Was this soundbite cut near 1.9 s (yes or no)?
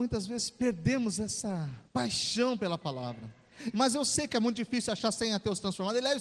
yes